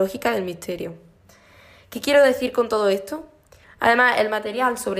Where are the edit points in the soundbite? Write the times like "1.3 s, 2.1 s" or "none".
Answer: 3.6 s